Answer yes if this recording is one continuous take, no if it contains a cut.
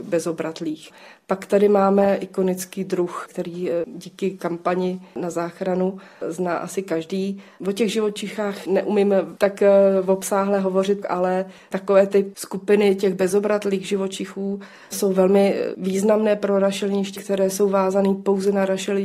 no